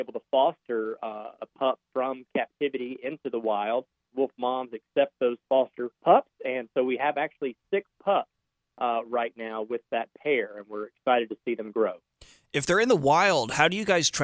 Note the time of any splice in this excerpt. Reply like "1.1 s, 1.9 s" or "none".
4.1 s, 5.9 s